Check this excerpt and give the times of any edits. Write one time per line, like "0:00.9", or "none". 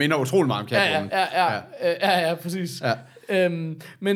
none